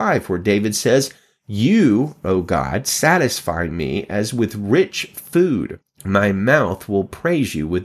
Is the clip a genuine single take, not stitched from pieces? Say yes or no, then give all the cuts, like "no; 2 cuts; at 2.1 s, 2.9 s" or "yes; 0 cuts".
yes; 0 cuts